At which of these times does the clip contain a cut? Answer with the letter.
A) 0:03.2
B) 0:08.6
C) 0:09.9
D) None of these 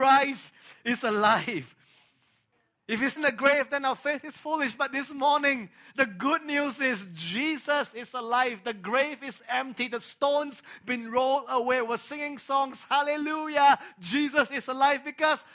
A